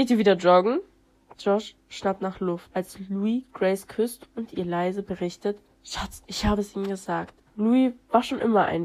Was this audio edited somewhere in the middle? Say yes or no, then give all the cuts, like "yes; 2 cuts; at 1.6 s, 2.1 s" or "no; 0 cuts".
yes; 2 cuts; at 1.3 s, 7.4 s